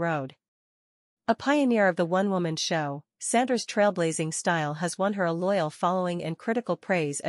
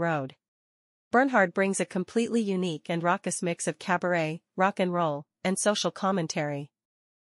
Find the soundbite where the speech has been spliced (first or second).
second